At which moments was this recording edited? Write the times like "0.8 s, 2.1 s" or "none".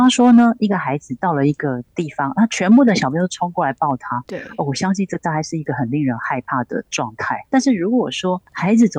7.5 s